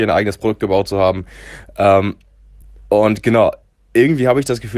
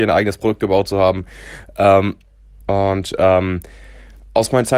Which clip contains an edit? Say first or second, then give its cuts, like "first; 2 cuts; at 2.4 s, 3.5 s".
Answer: second; 1 cut; at 2.6 s